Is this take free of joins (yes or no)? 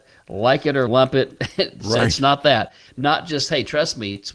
no